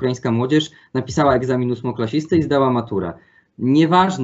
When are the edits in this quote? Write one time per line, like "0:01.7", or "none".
none